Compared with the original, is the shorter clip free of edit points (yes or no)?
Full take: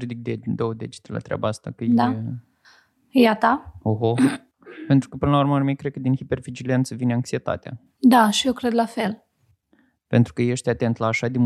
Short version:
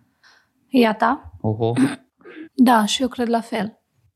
no